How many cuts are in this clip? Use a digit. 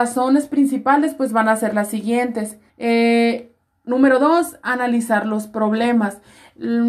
1